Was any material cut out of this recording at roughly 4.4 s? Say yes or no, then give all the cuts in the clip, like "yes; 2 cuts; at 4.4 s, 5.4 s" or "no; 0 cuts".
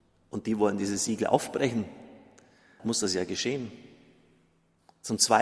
no; 1 cut; at 2.8 s